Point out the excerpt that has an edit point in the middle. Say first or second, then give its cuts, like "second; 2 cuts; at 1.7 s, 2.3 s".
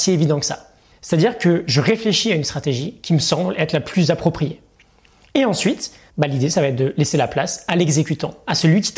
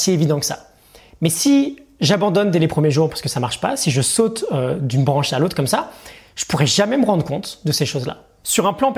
first; 2 cuts; at 0.9 s, 6.1 s